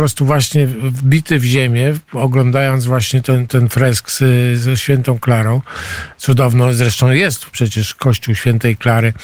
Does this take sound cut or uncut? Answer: cut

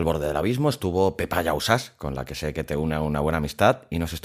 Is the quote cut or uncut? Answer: uncut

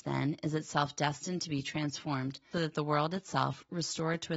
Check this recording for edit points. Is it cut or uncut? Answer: cut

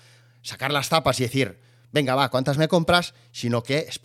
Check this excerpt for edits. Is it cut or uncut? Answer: uncut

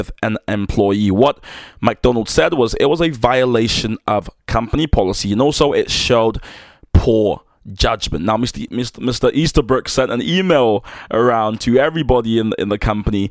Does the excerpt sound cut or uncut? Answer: uncut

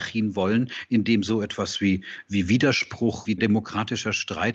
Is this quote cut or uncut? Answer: cut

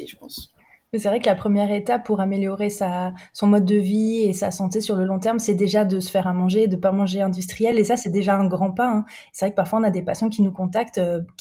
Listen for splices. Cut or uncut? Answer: uncut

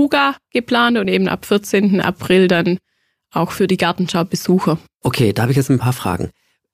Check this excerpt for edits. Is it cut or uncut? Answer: uncut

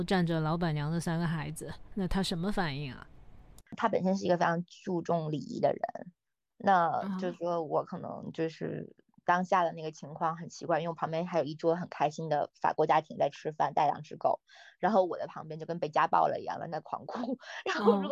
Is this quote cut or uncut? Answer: cut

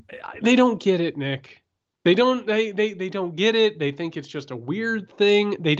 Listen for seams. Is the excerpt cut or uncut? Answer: uncut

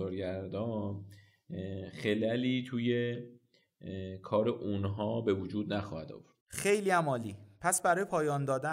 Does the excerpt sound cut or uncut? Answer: cut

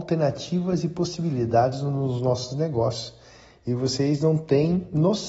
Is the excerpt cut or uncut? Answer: uncut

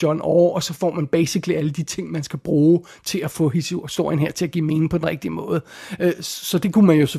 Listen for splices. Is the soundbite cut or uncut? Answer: uncut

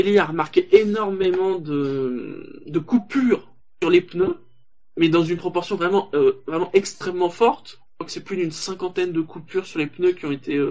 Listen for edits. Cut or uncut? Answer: uncut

